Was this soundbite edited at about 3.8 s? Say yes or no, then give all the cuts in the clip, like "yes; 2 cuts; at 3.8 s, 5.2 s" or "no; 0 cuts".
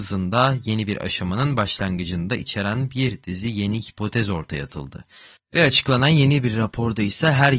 no; 1 cut; at 5.4 s